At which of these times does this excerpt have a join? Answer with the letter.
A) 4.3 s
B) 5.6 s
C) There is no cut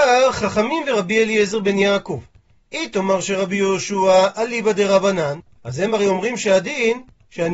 B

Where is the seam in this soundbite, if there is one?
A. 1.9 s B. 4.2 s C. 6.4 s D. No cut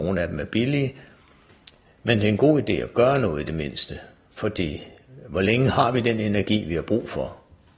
D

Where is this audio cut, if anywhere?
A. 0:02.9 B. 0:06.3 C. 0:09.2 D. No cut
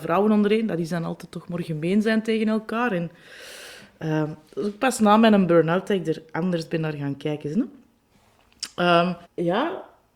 C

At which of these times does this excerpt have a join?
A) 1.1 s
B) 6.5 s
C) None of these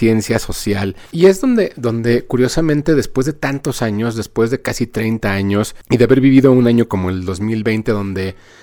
A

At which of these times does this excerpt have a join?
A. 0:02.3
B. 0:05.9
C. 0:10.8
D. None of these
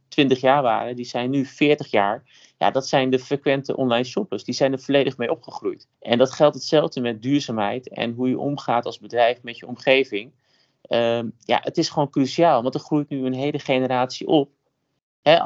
B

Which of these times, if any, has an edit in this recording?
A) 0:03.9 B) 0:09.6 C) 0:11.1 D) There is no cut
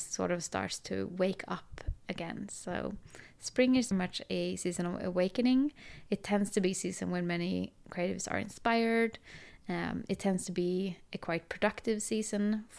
A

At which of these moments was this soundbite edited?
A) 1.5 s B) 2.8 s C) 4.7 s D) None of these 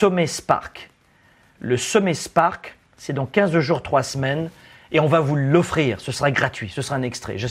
B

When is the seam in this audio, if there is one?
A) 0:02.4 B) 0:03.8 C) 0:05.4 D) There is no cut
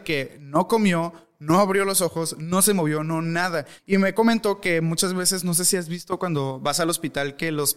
B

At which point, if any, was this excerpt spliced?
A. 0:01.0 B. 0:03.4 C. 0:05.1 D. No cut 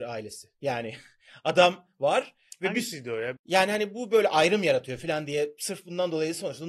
B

